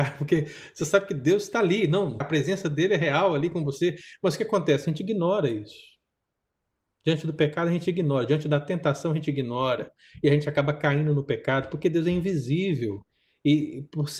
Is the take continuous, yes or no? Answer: no